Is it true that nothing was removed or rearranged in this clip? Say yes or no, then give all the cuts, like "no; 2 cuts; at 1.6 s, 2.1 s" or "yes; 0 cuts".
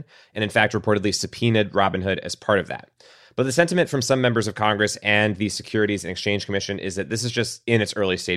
yes; 0 cuts